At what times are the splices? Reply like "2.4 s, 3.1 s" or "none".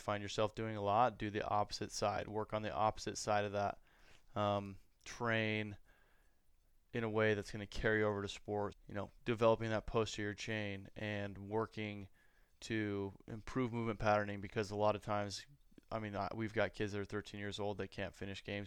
8.7 s